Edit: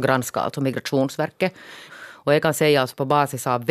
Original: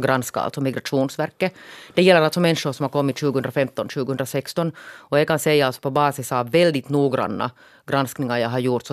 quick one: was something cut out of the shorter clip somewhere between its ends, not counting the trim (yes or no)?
yes